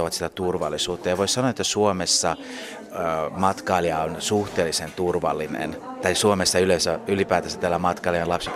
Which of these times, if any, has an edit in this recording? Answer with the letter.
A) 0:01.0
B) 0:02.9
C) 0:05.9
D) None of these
D